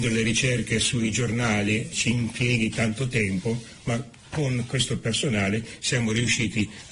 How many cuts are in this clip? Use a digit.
1